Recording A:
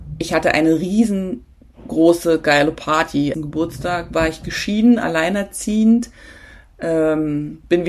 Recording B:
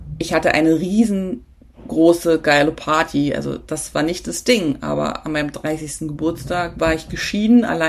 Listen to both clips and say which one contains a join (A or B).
A